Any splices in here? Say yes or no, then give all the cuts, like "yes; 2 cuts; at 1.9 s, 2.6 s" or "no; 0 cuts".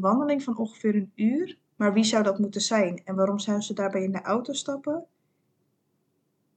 yes; 1 cut; at 1.6 s